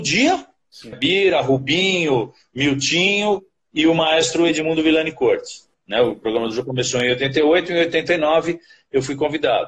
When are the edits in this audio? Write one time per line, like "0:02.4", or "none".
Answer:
0:00.9
0:05.7